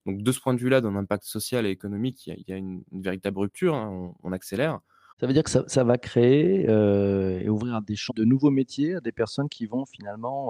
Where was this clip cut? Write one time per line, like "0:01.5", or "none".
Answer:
0:05.1
0:08.1